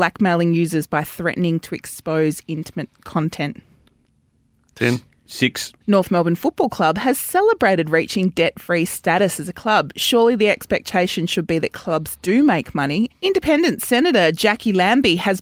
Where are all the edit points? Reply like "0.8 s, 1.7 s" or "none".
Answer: 5.8 s, 13.1 s

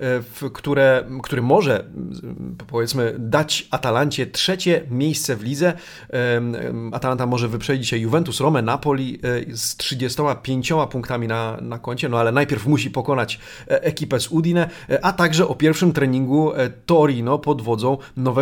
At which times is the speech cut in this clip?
none

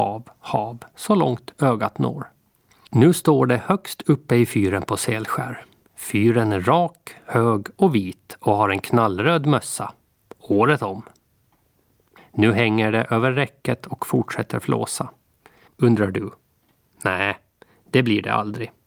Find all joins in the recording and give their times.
2.9 s, 12.2 s, 15.7 s

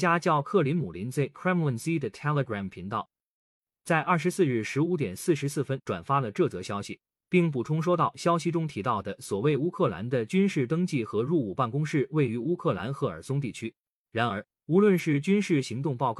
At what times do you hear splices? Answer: none

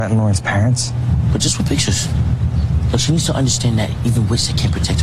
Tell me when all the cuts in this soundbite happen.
none

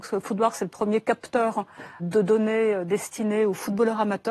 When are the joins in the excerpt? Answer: 2.0 s

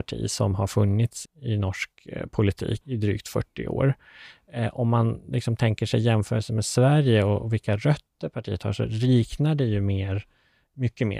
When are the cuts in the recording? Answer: 1.3 s, 2.8 s

